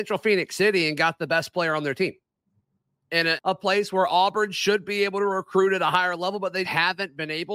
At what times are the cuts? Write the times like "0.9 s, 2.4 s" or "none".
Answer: 3.4 s, 6.6 s